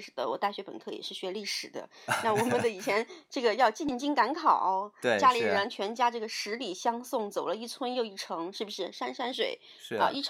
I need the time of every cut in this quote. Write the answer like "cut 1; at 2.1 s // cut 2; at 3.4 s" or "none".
cut 1; at 9.3 s